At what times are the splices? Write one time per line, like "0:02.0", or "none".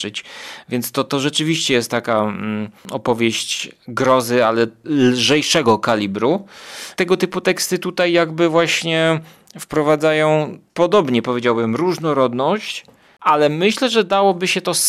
0:02.8